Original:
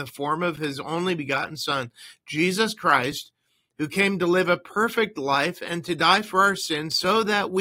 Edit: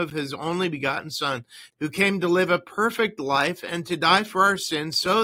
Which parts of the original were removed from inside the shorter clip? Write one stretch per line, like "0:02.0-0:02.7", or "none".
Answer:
0:02.2-0:03.7